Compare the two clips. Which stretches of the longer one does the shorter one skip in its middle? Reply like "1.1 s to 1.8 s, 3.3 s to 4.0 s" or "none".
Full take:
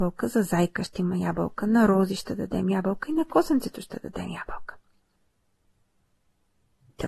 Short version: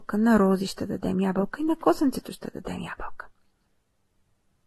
none